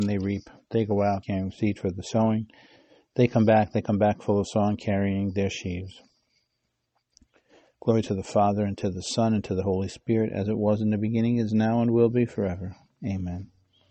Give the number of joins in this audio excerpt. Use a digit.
1